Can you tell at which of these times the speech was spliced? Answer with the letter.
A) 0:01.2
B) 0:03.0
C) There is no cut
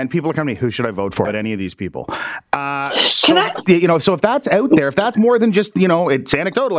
A